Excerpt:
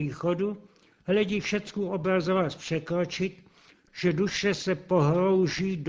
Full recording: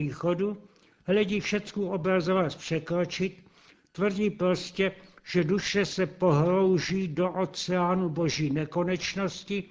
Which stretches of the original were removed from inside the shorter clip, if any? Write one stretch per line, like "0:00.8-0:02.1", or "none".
0:03.9-0:05.2

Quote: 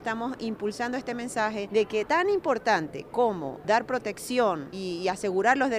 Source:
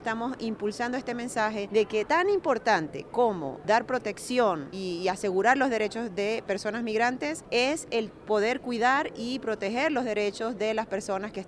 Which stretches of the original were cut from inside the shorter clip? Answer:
none

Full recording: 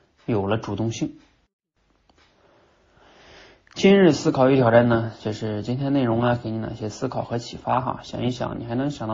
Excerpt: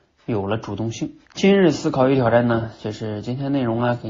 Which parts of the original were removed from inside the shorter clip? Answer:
0:01.2-0:03.7

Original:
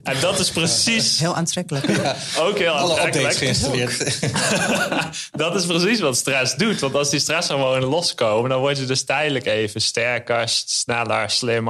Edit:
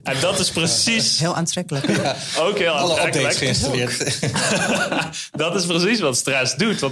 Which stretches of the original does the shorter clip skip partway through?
none

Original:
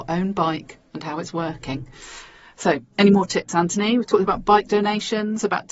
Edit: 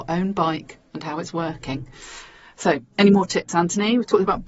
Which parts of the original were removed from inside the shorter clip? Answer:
none

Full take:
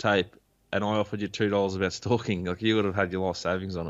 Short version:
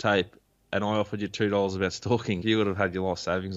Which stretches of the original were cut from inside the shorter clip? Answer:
0:02.4-0:02.6

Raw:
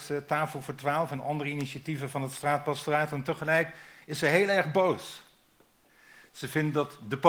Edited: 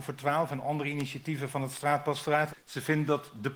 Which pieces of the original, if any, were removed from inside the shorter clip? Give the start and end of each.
0:03.1-0:06.2

